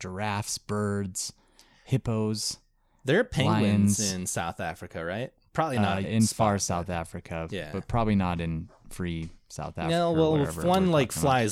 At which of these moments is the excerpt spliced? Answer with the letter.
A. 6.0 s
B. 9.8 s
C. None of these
A